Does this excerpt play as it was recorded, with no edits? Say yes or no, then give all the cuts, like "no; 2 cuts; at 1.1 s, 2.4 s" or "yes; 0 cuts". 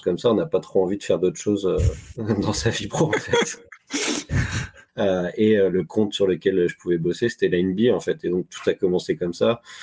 no; 1 cut; at 4.9 s